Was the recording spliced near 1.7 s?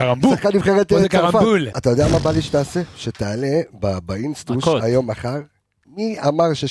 yes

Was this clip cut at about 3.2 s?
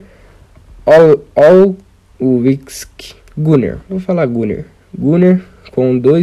yes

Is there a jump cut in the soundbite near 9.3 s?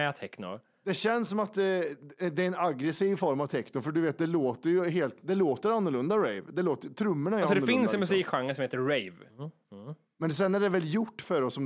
yes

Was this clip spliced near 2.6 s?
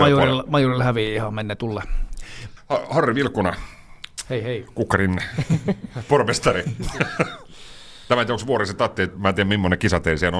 yes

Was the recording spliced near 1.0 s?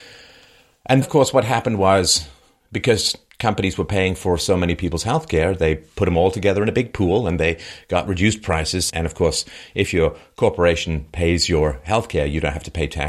yes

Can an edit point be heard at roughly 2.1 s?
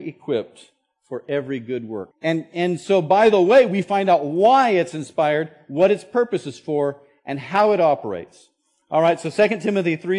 yes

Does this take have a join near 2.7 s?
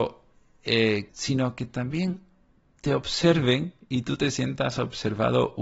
no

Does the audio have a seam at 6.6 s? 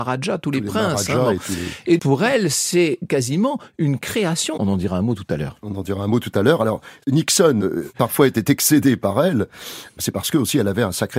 no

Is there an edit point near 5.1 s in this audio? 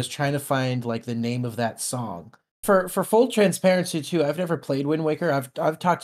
no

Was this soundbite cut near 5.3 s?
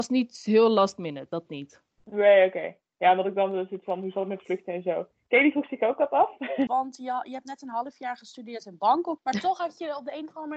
no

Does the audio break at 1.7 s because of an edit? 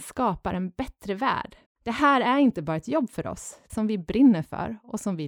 yes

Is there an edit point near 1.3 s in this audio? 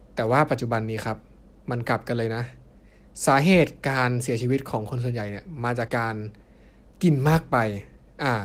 no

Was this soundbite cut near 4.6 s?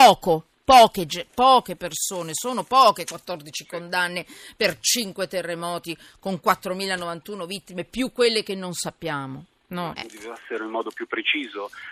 no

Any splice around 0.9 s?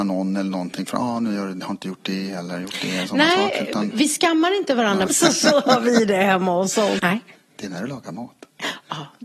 no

